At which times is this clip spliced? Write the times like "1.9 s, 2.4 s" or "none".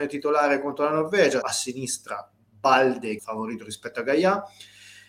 1.4 s, 3.2 s

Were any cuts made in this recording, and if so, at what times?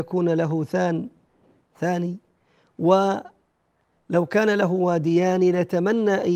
none

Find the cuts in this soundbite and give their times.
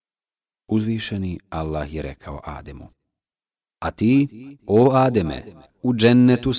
5.7 s

